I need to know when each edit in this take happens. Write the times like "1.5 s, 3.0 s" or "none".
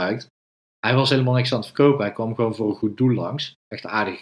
none